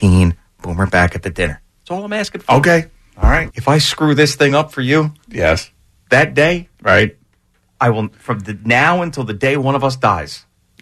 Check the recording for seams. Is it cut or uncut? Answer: cut